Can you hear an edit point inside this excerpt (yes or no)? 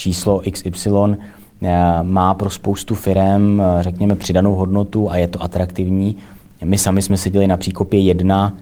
no